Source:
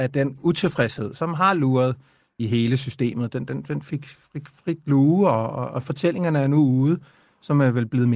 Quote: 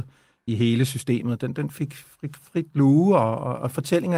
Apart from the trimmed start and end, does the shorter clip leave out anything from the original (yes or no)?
yes